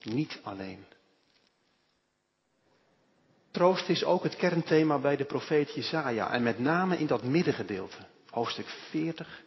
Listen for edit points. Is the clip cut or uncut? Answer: uncut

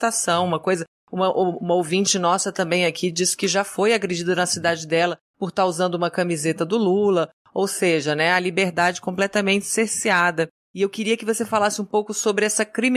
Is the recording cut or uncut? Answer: uncut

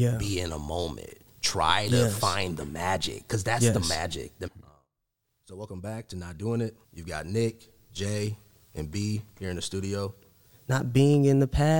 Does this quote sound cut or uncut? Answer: cut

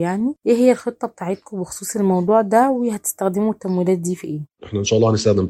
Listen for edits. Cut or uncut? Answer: cut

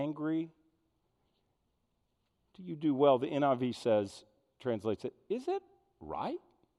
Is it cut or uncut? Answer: uncut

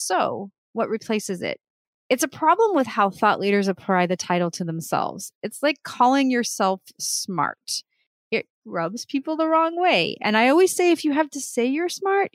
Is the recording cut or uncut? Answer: uncut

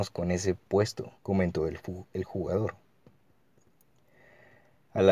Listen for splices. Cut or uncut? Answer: cut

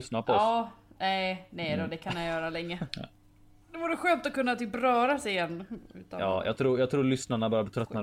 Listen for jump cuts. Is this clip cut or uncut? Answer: cut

